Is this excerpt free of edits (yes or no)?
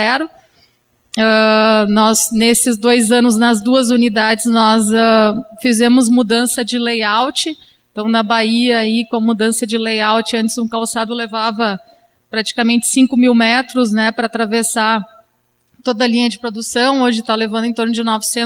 yes